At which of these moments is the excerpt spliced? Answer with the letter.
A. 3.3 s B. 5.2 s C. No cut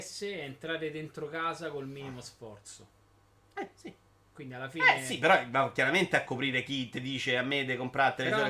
C